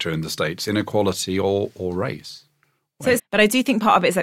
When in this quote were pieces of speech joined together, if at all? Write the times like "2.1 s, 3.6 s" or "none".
3.2 s